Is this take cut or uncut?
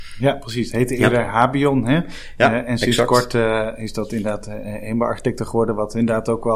uncut